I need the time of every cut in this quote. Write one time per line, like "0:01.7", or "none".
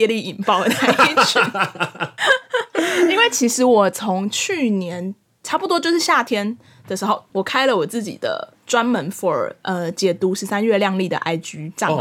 0:02.2
0:07.3